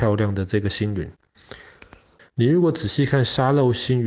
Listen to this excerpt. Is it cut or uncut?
cut